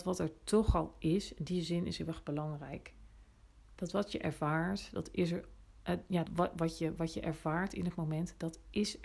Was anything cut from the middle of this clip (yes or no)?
yes